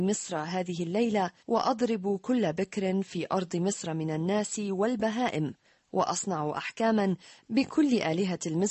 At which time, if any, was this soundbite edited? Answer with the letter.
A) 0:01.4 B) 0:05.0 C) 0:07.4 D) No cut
A